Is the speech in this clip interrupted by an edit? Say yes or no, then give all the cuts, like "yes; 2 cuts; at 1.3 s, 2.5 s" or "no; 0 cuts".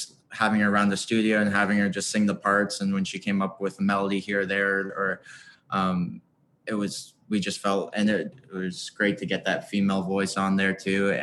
yes; 2 cuts; at 4.9 s, 8.3 s